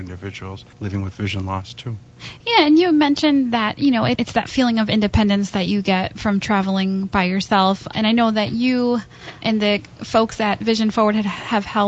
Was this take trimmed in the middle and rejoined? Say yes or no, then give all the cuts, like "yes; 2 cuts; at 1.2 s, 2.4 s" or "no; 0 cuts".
no; 0 cuts